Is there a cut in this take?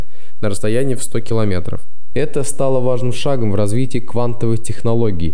no; 0 cuts

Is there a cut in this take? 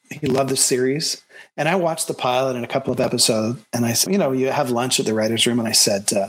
yes; 1 cut; at 4.1 s

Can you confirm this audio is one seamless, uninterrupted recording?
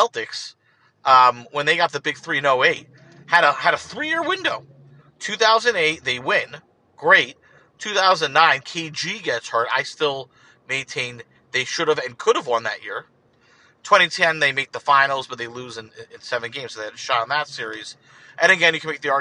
yes; 0 cuts

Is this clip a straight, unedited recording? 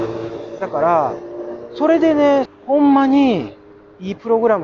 no; 1 cut; at 2.5 s

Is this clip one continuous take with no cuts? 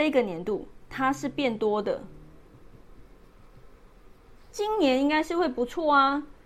no; 1 cut; at 4.5 s

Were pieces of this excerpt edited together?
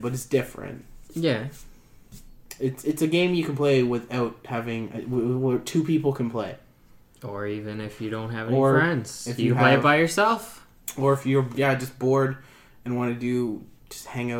no; 0 cuts

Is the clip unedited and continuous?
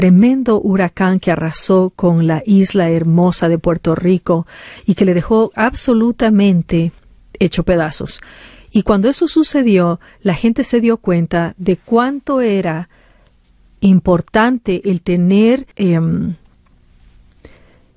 no; 1 cut; at 15.7 s

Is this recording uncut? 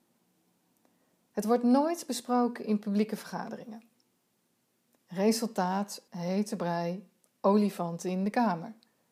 no; 1 cut; at 6.1 s

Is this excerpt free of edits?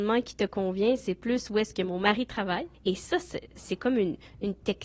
no; 1 cut; at 2.7 s

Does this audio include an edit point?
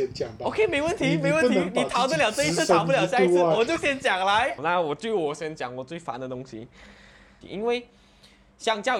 yes; 2 cuts; at 4.6 s, 7.4 s

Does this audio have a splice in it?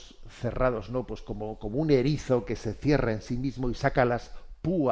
no; 0 cuts

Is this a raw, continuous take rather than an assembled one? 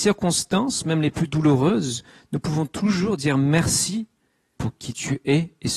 no; 1 cut; at 4.6 s

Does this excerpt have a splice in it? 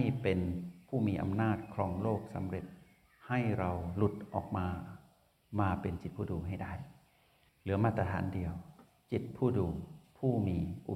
no; 0 cuts

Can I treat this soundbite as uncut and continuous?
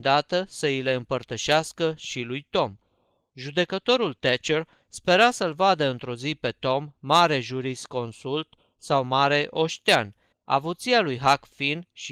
no; 1 cut; at 10.3 s

